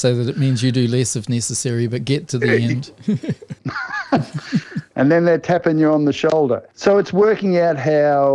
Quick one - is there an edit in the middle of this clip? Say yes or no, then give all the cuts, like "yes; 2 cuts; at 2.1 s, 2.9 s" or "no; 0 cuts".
yes; 1 cut; at 3.6 s